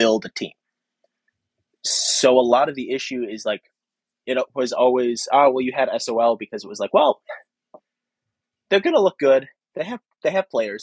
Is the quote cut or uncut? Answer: uncut